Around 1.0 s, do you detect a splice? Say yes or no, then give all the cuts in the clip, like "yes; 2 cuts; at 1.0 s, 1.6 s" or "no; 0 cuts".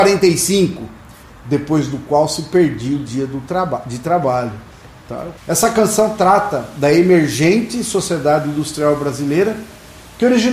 no; 1 cut; at 5.4 s